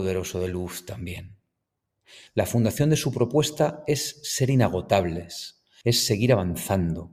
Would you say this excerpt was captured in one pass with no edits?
no; 2 cuts; at 2.3 s, 5.8 s

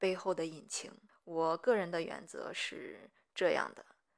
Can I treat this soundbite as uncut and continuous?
no; 1 cut; at 1.1 s

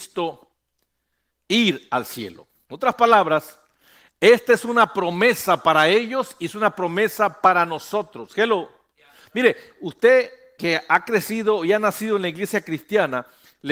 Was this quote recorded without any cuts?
yes; 0 cuts

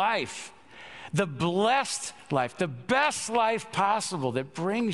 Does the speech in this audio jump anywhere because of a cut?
no; 0 cuts

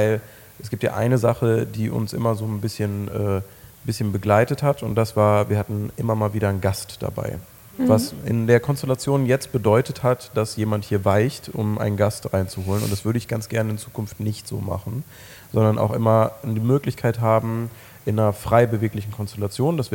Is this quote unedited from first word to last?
yes; 0 cuts

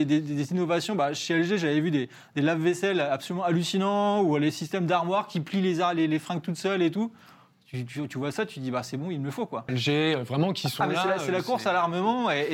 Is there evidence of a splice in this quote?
yes; 1 cut; at 9.7 s

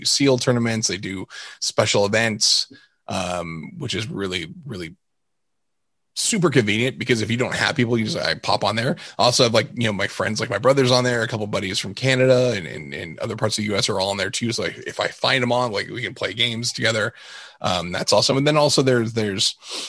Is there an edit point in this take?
no; 0 cuts

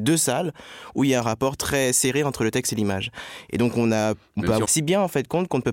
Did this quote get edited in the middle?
yes; 1 cut; at 4.6 s

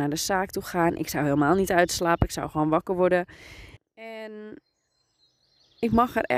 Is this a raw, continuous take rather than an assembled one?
no; 1 cut; at 3.8 s

